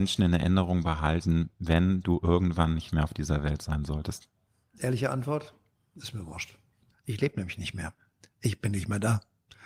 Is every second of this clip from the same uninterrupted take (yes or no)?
yes